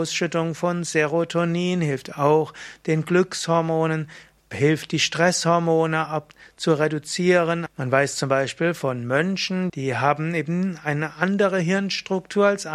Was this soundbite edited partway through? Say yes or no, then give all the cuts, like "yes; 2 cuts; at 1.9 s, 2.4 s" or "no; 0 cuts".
yes; 2 cuts; at 7.7 s, 9.7 s